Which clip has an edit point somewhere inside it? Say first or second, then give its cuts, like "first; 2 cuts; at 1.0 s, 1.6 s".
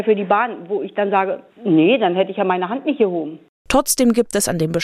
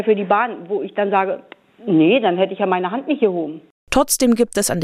first; 1 cut; at 1.5 s